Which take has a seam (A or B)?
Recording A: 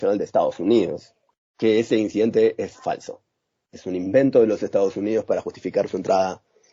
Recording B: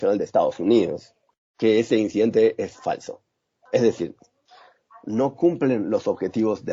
B